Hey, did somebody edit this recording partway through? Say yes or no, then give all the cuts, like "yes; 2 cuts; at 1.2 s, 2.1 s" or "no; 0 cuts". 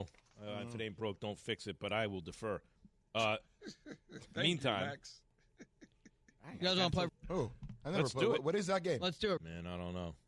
yes; 2 cuts; at 7.1 s, 9.4 s